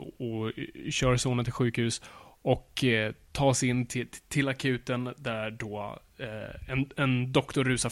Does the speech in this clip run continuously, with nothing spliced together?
yes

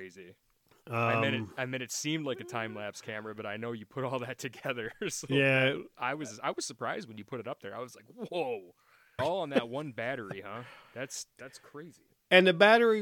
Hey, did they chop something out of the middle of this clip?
yes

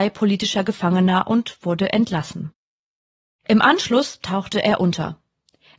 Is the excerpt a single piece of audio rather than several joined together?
yes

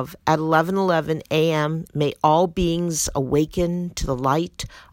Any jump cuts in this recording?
yes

